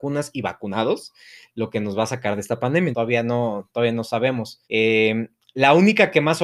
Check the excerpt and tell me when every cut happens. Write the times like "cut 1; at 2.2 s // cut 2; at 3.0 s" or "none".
cut 1; at 2.9 s // cut 2; at 4.6 s